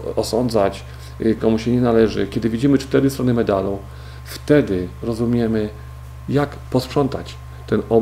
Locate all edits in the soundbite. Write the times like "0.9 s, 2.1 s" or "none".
1.4 s

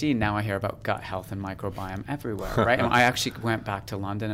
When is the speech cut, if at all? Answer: none

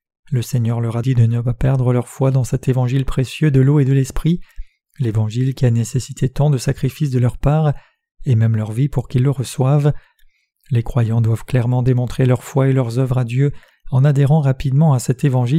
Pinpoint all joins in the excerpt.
1.0 s

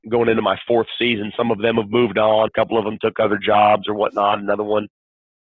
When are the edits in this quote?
2.5 s

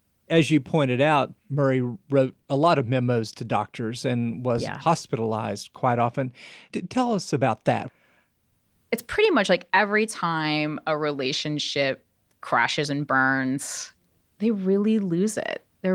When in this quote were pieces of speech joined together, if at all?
none

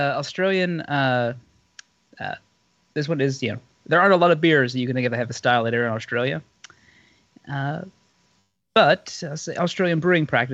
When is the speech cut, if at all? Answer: none

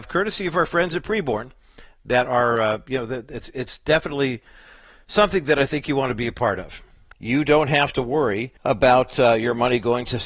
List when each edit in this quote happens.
7.1 s, 8.6 s

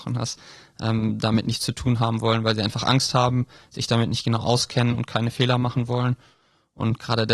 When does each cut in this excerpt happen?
none

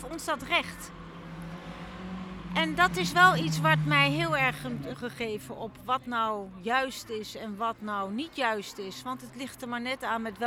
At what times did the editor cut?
4.9 s

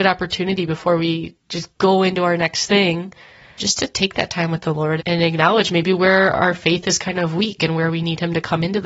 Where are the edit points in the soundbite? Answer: 3.6 s, 5.0 s

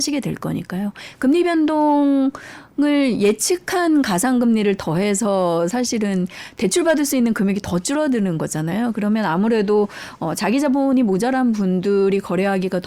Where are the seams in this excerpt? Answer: 1.2 s

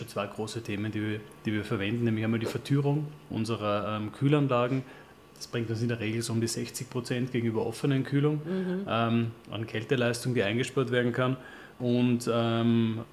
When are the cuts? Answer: none

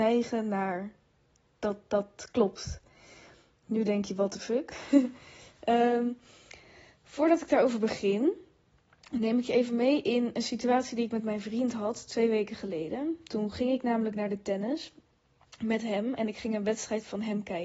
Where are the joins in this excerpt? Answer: none

